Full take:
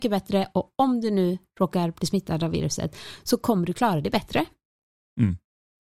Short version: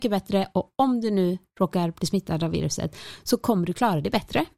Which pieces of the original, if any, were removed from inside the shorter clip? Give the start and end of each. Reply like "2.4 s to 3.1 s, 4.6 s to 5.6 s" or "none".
none